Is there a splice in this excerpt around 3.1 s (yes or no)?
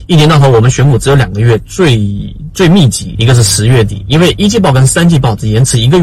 yes